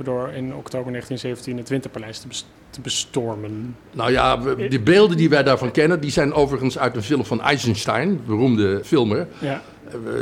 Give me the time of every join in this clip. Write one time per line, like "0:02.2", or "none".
0:08.8